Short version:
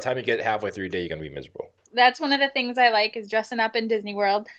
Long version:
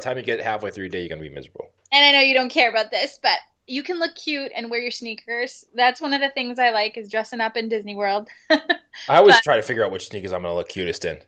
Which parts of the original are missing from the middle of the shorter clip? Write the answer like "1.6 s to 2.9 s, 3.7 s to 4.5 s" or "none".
1.9 s to 5.7 s